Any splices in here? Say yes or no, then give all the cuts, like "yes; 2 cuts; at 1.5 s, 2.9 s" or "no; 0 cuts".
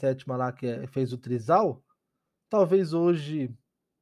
no; 0 cuts